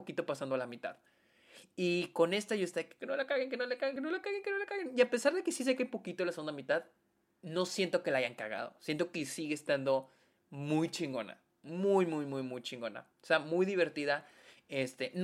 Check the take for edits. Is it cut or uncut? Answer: uncut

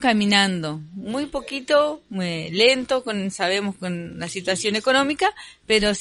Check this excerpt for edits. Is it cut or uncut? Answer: uncut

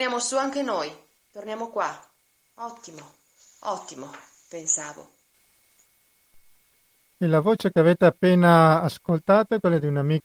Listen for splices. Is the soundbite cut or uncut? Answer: uncut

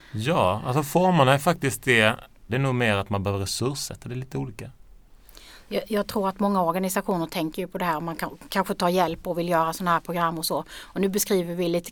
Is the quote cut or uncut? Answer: cut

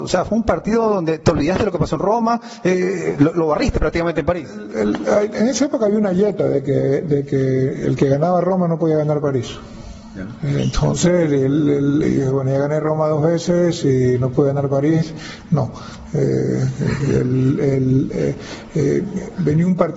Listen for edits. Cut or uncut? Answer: uncut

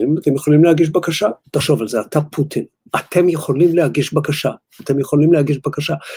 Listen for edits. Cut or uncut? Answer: cut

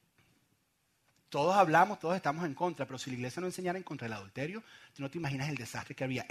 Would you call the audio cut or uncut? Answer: uncut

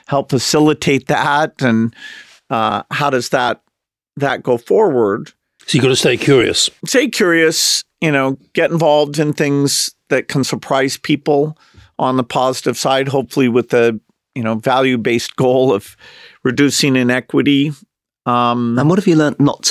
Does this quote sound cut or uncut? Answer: uncut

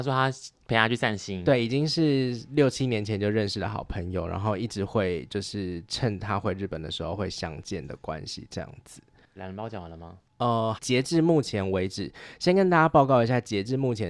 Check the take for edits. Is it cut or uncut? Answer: cut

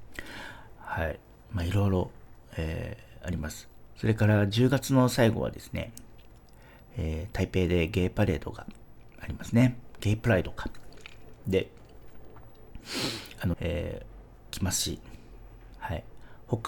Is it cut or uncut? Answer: cut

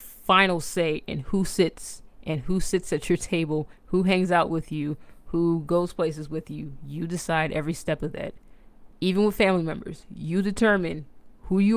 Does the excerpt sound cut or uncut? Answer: cut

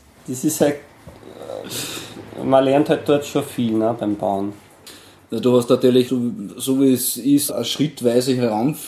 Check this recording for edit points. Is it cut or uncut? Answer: cut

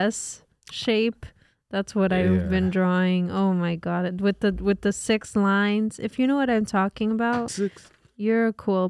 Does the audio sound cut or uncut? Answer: cut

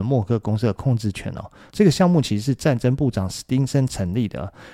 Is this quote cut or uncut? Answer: cut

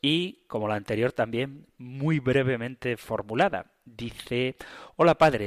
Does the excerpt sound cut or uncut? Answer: uncut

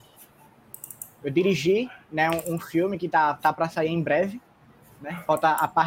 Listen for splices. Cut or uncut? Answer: uncut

